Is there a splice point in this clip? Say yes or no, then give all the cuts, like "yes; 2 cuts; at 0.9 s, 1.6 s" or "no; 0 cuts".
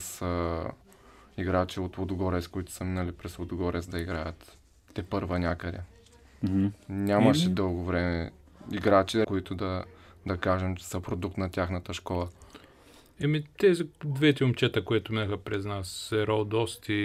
yes; 1 cut; at 9.2 s